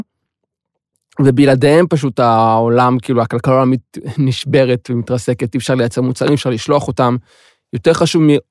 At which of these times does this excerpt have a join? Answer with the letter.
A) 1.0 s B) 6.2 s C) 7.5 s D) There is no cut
D